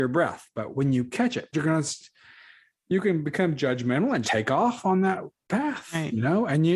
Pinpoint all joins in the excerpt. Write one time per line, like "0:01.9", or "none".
0:01.5
0:04.2